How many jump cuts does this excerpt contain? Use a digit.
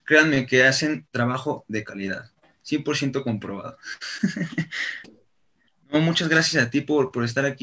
1